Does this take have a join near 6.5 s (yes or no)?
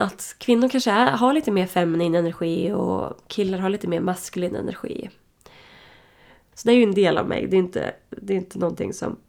yes